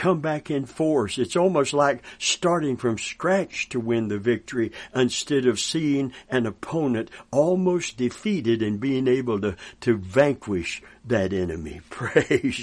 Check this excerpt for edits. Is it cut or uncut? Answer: uncut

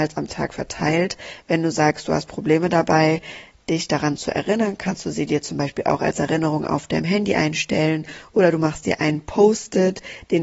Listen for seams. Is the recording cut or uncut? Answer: uncut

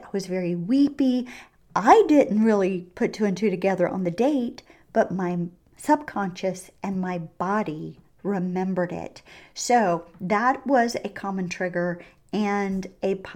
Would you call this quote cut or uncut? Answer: uncut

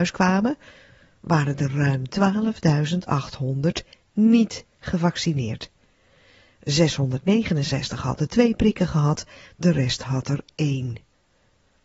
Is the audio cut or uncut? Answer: uncut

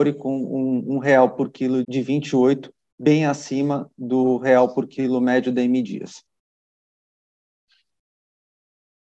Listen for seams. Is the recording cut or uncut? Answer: cut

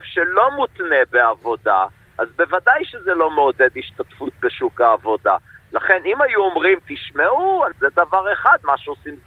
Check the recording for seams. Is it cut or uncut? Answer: cut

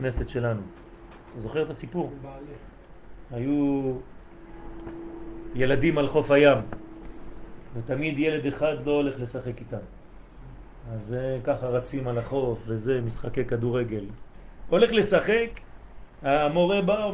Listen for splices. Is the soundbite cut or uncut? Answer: cut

